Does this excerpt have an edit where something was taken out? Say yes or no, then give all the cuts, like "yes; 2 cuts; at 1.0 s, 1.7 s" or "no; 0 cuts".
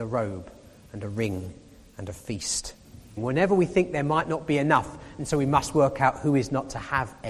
yes; 1 cut; at 3.2 s